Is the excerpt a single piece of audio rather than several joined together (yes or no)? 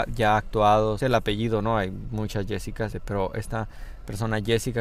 no